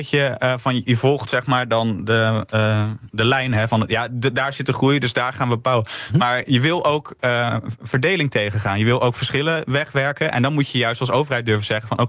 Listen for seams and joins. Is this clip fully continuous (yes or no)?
yes